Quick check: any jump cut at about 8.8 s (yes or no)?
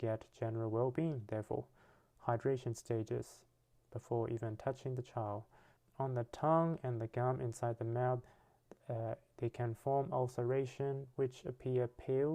no